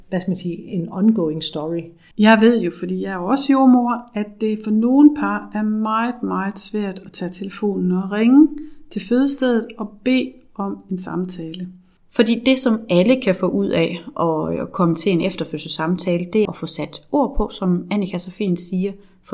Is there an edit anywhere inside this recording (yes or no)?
yes